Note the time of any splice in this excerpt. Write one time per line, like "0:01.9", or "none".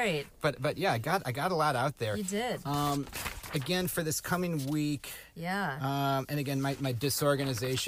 none